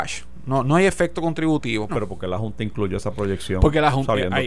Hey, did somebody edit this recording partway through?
yes; 1 cut; at 1.9 s

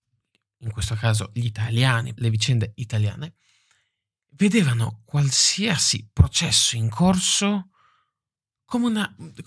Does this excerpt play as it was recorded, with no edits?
no; 1 cut; at 2.2 s

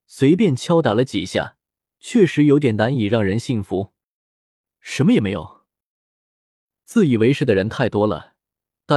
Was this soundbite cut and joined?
yes; 2 cuts; at 1.9 s, 4.8 s

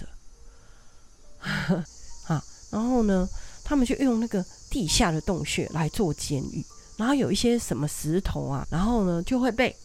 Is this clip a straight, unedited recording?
no; 2 cuts; at 1.9 s, 8.6 s

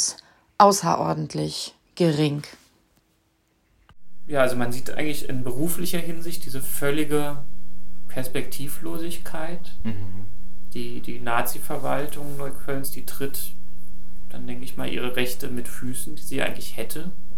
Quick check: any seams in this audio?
no; 0 cuts

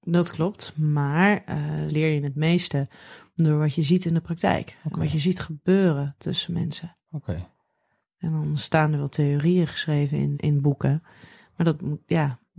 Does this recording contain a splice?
yes; 2 cuts; at 1.9 s, 10.3 s

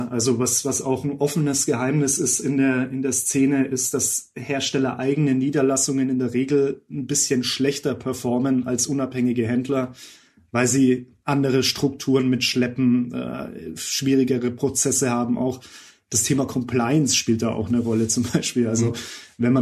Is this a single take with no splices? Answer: yes; 0 cuts

